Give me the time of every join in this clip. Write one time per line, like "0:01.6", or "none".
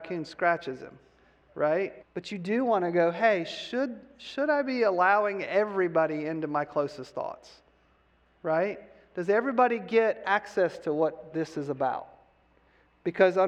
0:02.0